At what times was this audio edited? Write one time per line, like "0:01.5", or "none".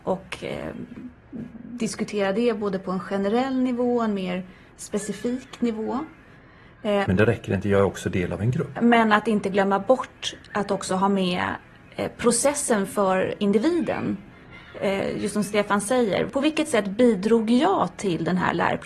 0:07.0
0:08.8